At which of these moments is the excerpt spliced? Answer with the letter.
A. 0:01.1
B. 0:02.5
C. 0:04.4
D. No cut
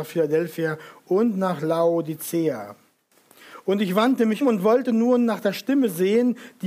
C